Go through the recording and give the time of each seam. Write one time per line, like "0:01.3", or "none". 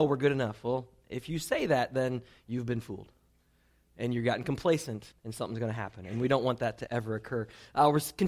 0:05.1
0:06.9